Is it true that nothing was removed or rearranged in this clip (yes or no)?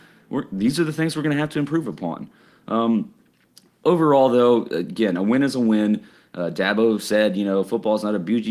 yes